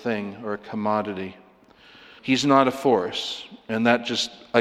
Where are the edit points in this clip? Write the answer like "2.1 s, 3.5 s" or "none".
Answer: 2.2 s